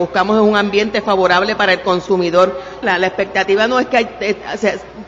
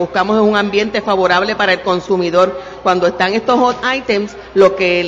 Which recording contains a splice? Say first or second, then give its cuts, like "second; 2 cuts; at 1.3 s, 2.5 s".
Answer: first; 1 cut; at 2.8 s